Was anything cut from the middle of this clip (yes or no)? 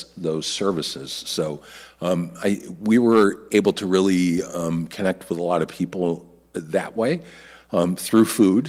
no